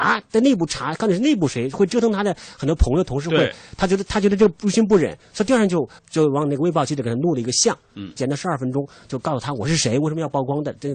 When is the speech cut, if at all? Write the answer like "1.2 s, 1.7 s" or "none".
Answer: 6.0 s, 8.2 s